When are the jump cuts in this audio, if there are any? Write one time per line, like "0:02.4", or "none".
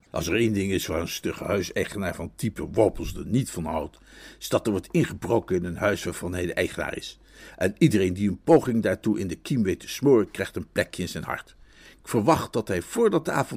none